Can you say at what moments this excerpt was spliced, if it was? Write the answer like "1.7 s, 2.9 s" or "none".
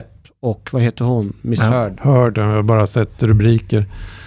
2.3 s

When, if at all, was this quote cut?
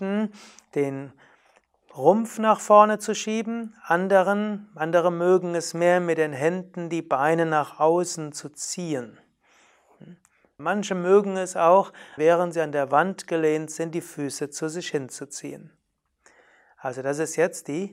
10.6 s, 12.2 s

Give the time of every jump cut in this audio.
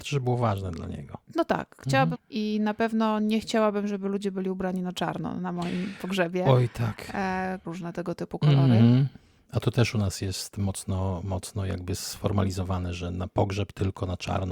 2.1 s, 7.6 s, 9.4 s

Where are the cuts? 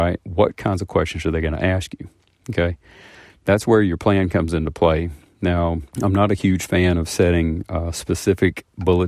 5.9 s

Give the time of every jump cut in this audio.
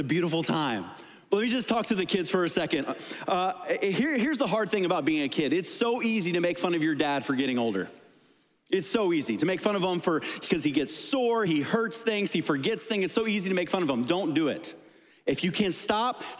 none

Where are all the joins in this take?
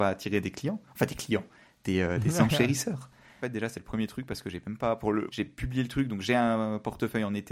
3.4 s, 5.3 s

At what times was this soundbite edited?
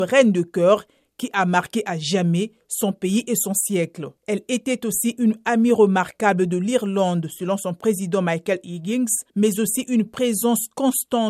4.2 s, 9.3 s

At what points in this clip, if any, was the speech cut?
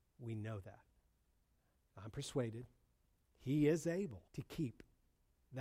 1.8 s, 4.3 s

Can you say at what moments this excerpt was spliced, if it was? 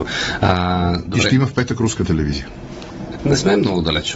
3.2 s

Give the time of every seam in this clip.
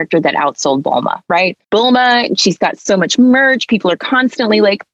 1.6 s

